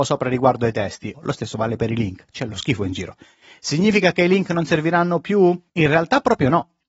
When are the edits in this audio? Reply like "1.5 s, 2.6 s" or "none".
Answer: 1.1 s